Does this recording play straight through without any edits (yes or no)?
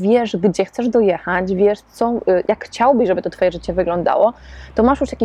no